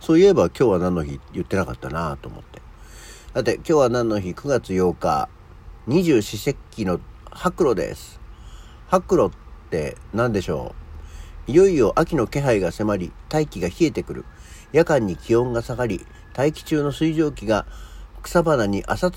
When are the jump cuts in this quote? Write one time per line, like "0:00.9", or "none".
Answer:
none